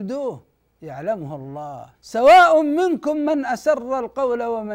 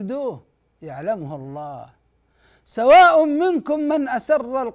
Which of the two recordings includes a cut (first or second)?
first